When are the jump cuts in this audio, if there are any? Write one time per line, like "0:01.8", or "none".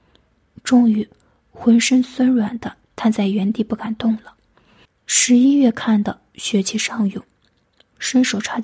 0:04.8